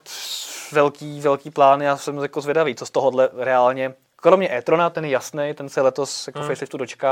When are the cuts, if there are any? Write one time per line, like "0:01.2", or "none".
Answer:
none